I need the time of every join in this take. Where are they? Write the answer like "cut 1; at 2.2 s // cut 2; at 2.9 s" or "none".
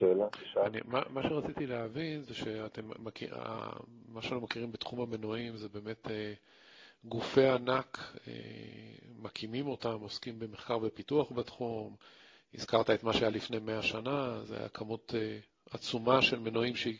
none